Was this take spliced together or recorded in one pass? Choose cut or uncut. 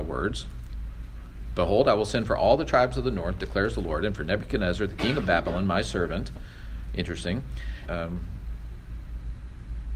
cut